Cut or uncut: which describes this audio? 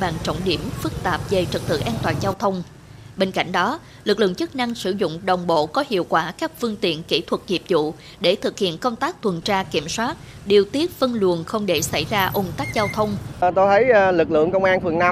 cut